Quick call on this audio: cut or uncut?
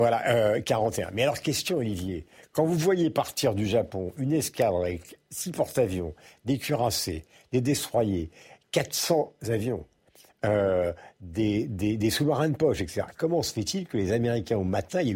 uncut